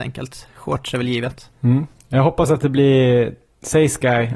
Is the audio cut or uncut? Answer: cut